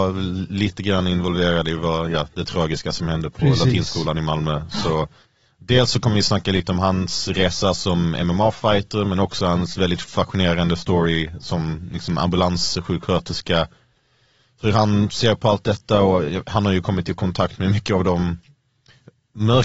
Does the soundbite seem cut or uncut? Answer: uncut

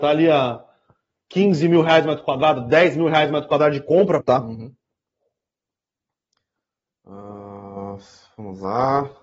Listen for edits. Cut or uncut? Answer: cut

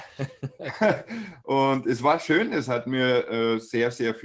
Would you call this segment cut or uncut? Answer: uncut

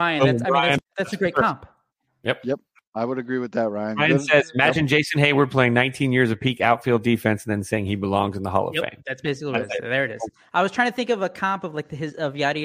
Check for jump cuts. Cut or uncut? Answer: uncut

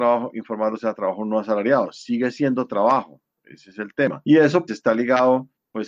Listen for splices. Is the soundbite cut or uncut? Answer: cut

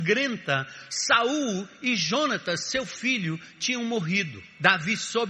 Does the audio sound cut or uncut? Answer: uncut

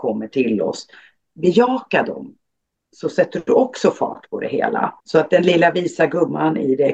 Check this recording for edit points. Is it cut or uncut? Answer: cut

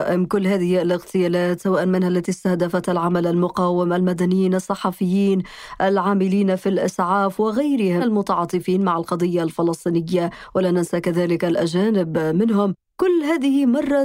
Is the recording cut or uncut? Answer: cut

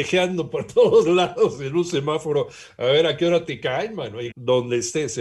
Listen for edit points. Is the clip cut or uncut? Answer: cut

